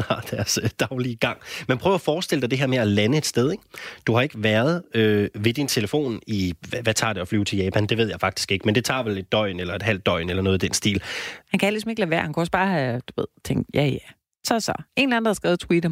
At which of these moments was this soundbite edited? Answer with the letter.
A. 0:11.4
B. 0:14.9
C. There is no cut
A